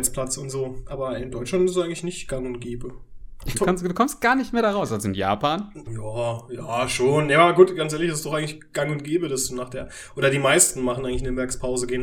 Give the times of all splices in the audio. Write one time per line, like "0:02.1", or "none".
0:03.5
0:05.9